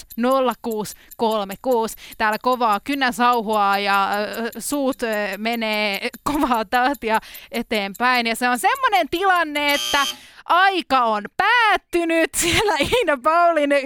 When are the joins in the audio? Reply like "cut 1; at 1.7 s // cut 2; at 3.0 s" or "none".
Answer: none